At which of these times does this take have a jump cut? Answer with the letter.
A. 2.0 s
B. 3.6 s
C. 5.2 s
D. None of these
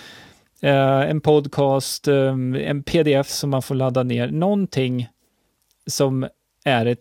D